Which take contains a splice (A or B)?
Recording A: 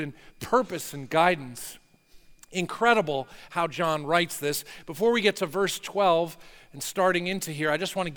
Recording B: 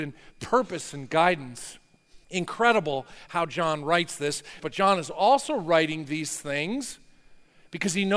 B